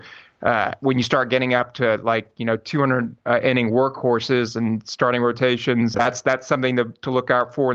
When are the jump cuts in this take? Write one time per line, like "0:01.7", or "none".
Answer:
0:05.9